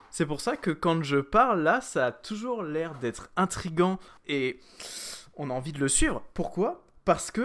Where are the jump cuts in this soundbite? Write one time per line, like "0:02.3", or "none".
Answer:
0:04.2